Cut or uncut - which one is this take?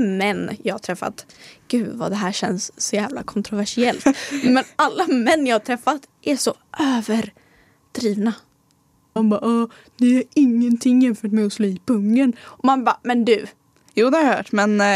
cut